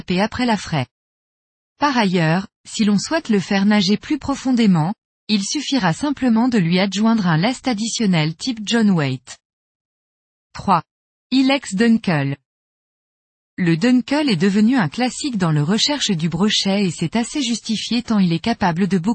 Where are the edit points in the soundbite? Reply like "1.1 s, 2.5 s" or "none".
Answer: 11.2 s